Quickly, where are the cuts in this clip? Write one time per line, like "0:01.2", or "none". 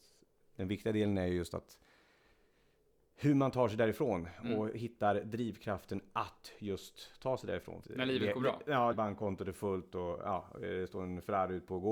0:07.8
0:08.9